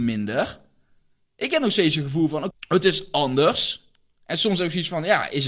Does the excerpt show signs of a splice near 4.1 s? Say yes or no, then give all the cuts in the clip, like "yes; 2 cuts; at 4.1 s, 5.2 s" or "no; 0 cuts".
no; 1 cut; at 2.5 s